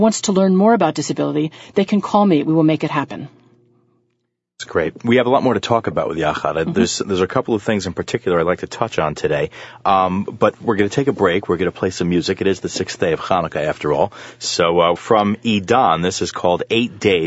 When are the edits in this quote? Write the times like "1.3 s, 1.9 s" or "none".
15.0 s

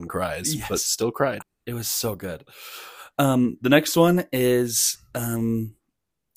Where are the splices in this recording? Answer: 1.4 s

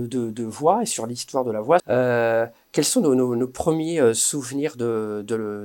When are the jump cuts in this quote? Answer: 1.8 s

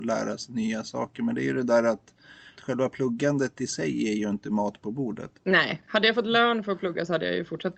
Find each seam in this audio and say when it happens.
2.5 s, 5.4 s

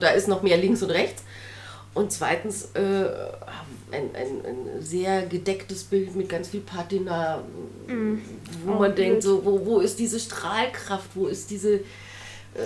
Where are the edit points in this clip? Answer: 3.9 s

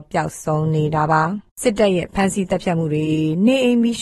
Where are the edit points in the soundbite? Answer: 1.5 s

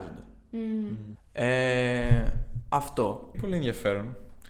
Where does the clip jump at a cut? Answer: 1.2 s, 3.3 s

